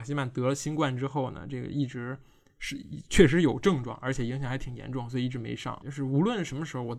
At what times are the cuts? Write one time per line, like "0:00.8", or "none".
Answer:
0:05.8